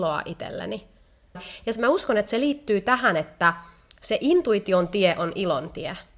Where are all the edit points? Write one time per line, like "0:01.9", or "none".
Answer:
0:01.3